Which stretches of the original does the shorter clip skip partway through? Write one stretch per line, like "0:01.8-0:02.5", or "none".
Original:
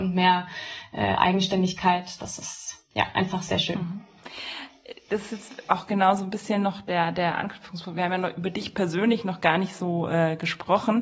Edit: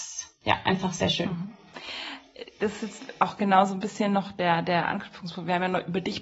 none